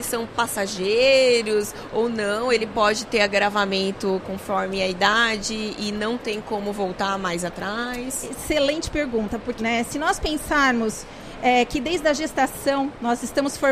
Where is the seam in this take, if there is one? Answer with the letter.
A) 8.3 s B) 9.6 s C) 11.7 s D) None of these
B